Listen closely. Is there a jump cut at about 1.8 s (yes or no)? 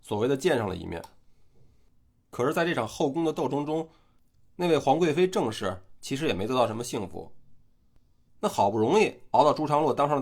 no